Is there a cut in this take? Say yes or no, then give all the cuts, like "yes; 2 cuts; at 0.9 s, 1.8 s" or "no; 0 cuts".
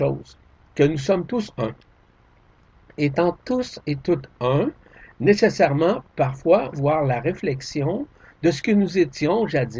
yes; 1 cut; at 6.7 s